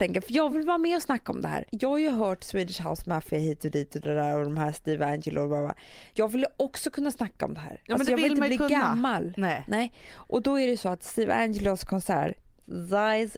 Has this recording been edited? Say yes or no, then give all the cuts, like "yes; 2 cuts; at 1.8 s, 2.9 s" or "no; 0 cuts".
yes; 1 cut; at 4.0 s